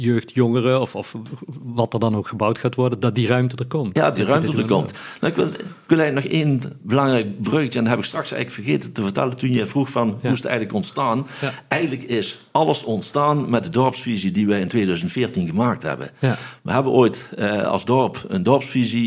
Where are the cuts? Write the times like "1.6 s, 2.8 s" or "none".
none